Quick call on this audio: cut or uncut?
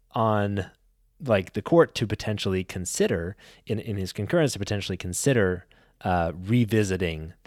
uncut